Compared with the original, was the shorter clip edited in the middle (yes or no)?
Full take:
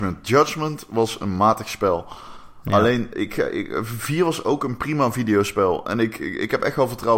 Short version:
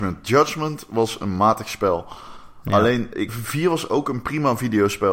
yes